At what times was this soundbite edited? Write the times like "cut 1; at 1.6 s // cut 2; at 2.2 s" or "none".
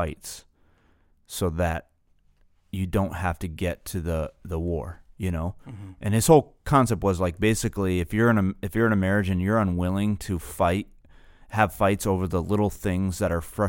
none